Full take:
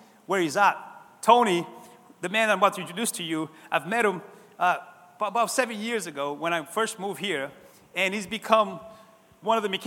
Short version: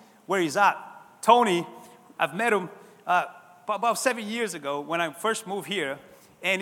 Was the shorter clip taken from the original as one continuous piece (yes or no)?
no